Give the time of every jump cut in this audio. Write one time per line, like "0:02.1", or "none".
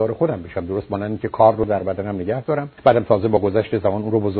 0:02.8

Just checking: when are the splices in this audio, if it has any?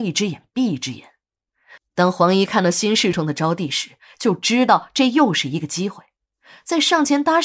0:01.8
0:03.1

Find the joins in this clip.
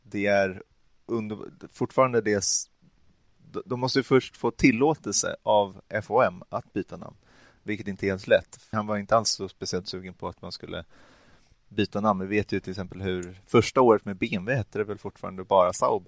0:08.7

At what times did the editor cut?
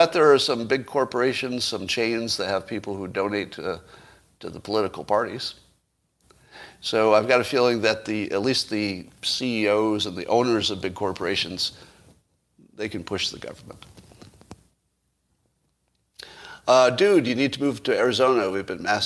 none

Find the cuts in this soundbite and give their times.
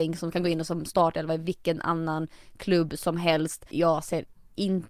0:03.7

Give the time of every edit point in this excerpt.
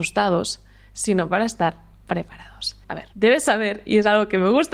0:02.8

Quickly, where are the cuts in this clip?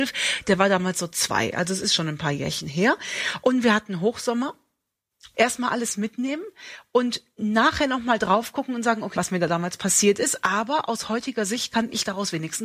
0:05.3
0:09.2

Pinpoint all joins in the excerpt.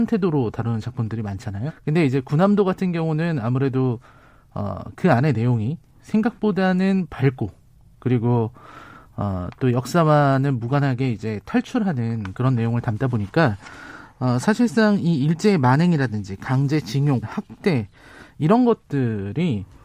0:01.7
0:17.2

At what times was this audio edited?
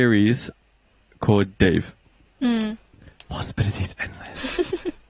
0:02.3

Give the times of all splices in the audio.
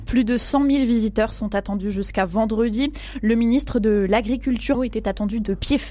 0:04.7

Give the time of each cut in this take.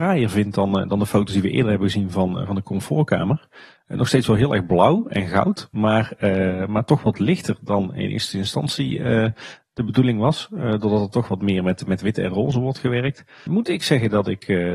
0:13.5

